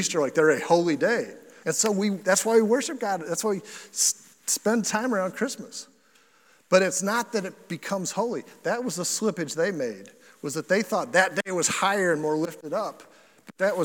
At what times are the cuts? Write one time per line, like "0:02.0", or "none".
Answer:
0:01.6